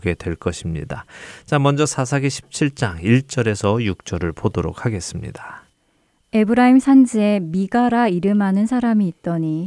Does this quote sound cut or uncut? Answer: uncut